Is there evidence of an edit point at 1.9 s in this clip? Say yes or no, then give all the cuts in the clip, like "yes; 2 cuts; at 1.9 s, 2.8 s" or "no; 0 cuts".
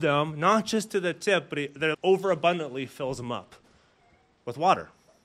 yes; 1 cut; at 1.9 s